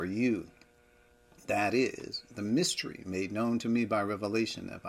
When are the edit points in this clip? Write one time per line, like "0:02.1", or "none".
none